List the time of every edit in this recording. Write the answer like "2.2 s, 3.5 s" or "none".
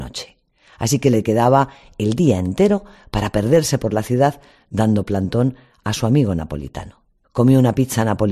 7.2 s